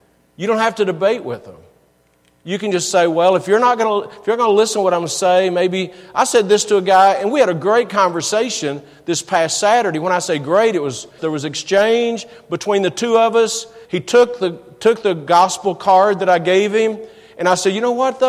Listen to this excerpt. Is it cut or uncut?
cut